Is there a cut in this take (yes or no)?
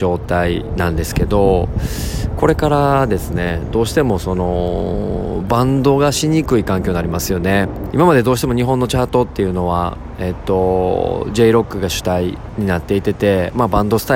yes